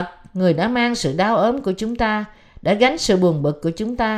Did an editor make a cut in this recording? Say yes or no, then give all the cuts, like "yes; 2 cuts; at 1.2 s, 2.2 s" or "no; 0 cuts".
no; 0 cuts